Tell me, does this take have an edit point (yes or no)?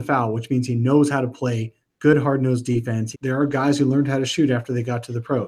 yes